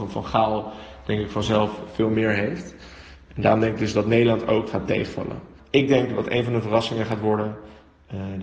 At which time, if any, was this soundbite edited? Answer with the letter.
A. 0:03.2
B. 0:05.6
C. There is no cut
B